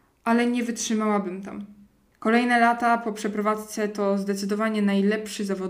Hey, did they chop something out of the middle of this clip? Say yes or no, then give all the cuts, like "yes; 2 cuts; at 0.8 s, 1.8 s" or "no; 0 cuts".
yes; 1 cut; at 2.1 s